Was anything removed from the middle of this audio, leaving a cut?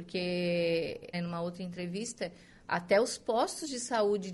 yes; 1 cut; at 1.1 s

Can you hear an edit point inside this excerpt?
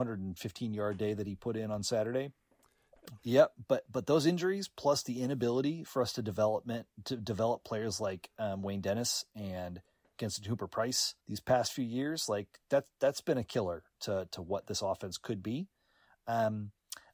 yes; 2 cuts; at 3.2 s, 11.2 s

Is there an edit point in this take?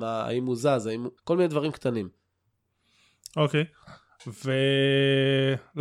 yes; 1 cut; at 1.2 s

